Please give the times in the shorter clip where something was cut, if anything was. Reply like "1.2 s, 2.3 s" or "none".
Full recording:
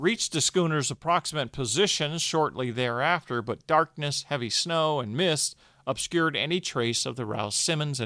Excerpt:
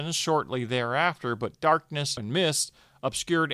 2.2 s

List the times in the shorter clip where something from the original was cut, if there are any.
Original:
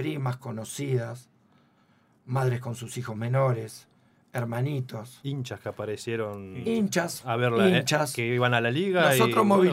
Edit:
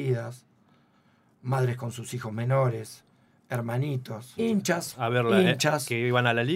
4.4 s

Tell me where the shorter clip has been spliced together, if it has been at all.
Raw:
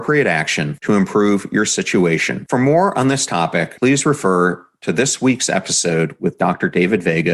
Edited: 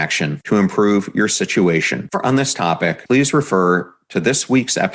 2.1 s

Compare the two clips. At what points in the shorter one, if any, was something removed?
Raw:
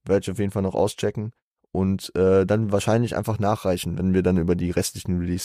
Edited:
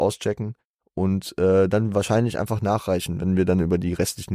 none

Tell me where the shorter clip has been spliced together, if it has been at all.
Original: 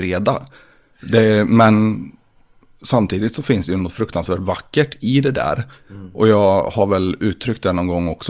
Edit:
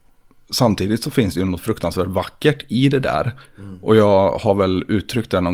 none

